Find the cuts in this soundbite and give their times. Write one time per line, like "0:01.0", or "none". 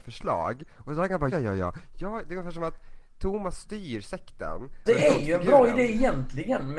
0:01.3
0:04.9